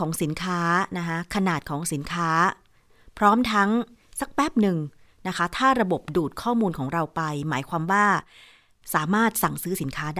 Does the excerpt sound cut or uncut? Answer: uncut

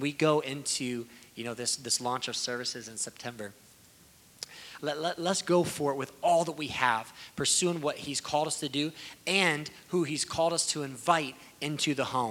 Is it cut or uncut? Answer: cut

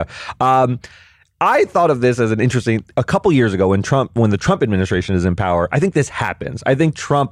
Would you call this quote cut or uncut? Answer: cut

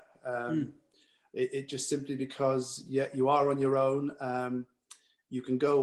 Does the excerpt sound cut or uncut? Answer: uncut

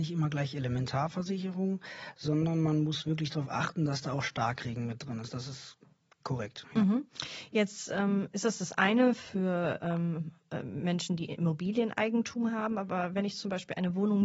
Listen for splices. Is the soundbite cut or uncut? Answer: uncut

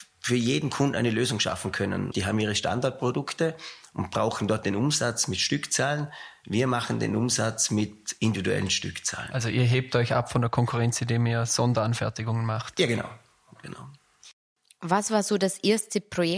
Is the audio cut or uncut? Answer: cut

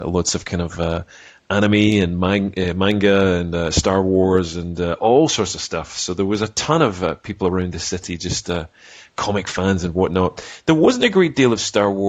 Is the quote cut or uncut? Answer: uncut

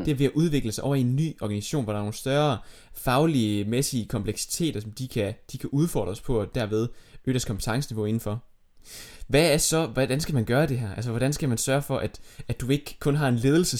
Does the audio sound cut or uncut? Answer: uncut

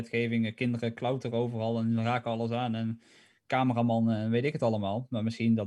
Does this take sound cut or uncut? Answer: uncut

